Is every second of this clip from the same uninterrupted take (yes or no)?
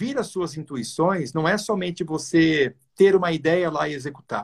yes